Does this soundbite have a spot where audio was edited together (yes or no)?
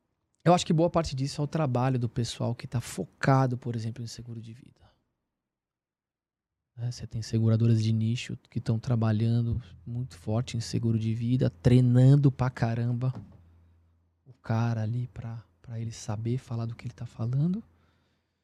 no